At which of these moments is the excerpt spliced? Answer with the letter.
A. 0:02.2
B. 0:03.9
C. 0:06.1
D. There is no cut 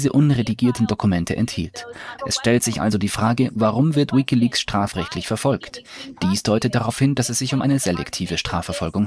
A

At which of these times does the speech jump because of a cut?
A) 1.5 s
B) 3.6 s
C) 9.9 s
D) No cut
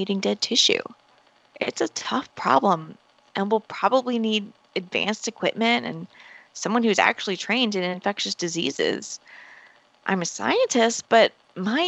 D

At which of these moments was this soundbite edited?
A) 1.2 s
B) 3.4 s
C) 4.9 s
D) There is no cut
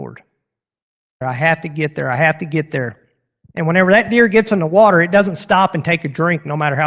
A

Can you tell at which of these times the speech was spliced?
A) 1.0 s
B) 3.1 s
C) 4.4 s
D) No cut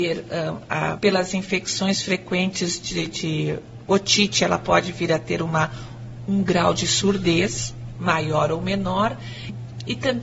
A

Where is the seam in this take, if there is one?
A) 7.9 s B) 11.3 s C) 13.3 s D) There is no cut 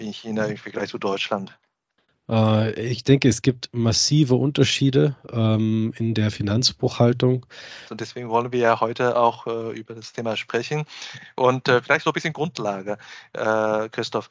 A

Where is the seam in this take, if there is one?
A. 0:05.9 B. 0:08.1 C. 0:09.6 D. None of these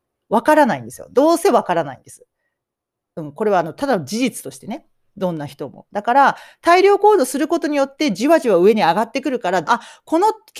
C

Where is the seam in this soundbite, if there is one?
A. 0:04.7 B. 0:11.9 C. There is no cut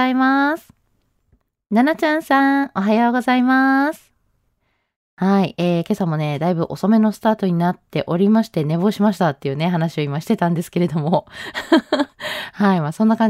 C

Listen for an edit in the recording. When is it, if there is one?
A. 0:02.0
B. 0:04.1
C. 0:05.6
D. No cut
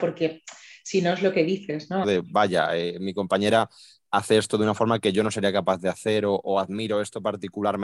A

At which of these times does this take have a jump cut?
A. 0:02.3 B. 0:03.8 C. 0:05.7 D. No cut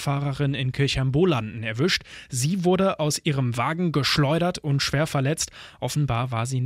D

